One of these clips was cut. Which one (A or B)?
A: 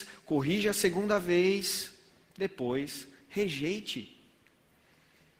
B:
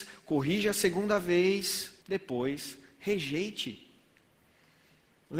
B